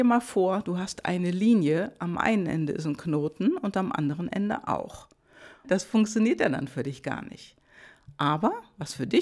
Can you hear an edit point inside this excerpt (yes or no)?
yes